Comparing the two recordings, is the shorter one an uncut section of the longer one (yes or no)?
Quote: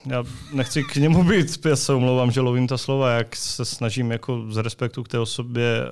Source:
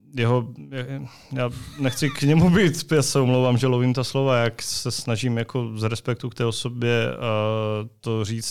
yes